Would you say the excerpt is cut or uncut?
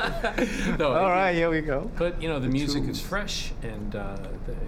cut